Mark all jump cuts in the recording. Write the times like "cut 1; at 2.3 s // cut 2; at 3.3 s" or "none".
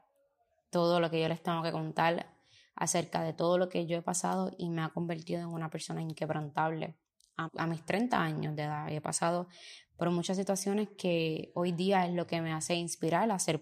cut 1; at 7.4 s